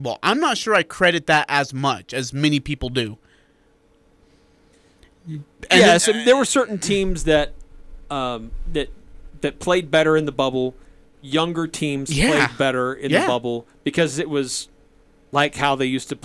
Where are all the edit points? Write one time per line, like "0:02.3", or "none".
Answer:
none